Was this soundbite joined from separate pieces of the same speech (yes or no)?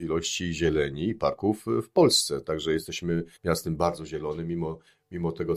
yes